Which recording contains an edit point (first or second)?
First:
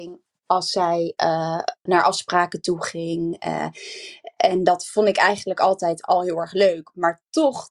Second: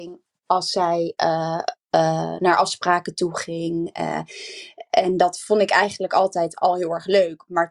first